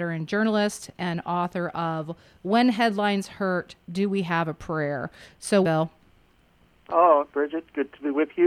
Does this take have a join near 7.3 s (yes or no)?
yes